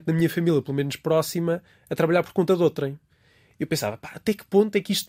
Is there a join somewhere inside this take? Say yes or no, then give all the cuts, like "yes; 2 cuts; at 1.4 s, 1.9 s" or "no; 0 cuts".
no; 0 cuts